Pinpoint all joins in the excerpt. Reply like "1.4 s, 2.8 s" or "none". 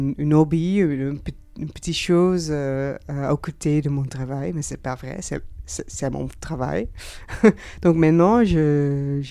none